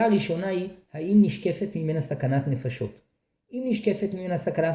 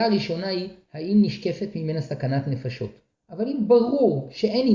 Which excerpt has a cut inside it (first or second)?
second